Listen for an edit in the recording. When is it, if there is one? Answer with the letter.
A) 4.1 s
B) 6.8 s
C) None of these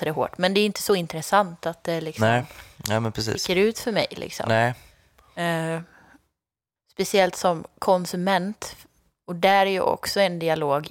B